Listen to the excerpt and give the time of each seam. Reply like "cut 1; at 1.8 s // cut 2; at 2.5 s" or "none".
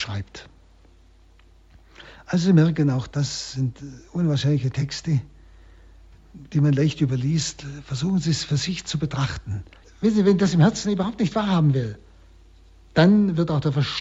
cut 1; at 9.8 s